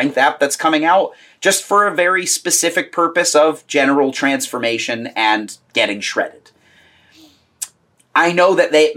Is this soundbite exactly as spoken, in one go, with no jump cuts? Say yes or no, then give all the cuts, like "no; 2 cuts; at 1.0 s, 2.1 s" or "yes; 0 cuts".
no; 1 cut; at 7.9 s